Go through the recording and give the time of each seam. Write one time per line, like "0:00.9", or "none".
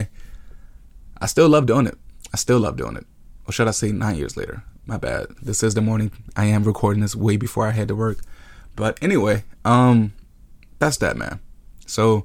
0:05.3